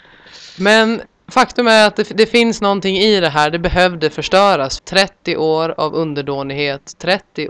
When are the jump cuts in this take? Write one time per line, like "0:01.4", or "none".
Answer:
0:04.8